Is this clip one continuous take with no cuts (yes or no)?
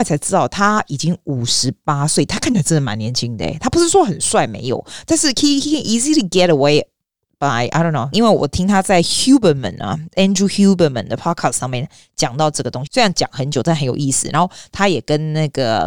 no